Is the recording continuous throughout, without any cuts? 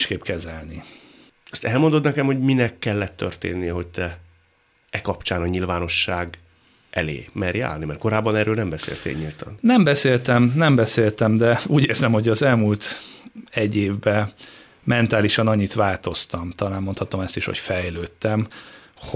yes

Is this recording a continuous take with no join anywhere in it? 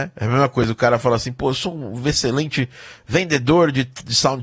yes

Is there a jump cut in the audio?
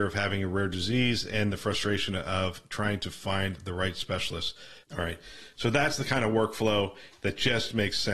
yes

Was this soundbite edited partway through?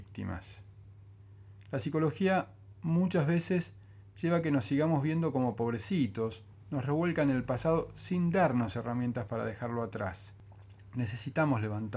no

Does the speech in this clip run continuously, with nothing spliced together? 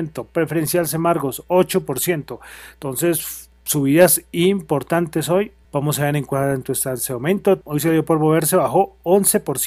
no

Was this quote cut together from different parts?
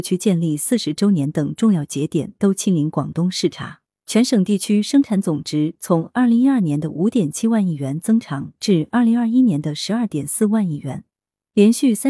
yes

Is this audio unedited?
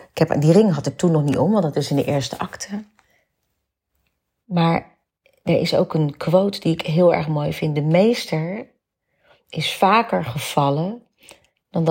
yes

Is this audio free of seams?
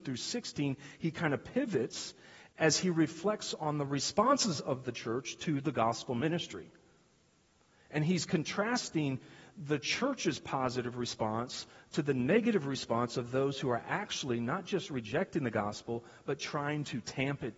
yes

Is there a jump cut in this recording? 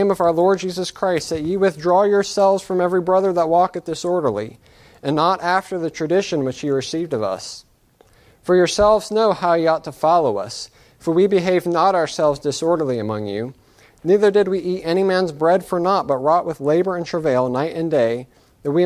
no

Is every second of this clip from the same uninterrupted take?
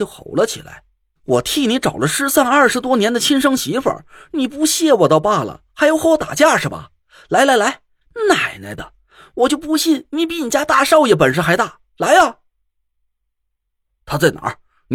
yes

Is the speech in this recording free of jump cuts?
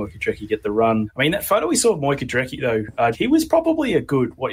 no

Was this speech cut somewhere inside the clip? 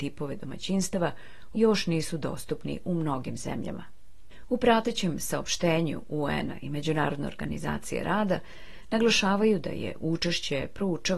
yes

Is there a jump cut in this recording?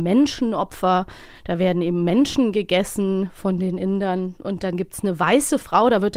no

